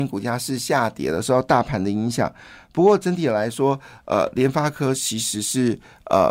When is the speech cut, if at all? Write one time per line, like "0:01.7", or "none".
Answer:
none